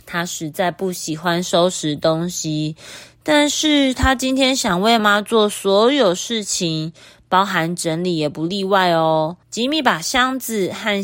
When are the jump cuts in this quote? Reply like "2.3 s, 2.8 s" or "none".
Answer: 5.0 s, 9.4 s

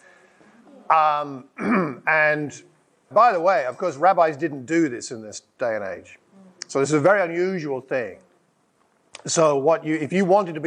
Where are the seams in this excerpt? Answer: 3.1 s

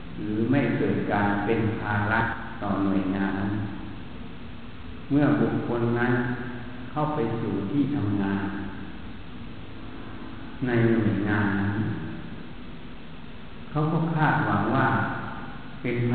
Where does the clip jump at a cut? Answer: 3.3 s

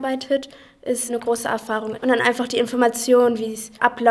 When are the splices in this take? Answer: 1.9 s

